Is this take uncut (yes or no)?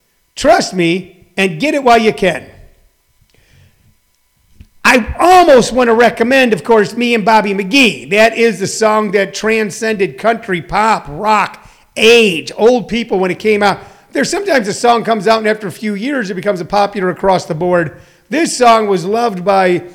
yes